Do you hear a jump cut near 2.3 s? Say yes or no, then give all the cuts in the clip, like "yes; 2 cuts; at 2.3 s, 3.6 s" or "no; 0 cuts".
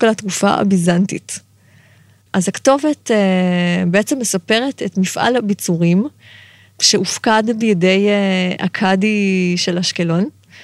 yes; 1 cut; at 2.3 s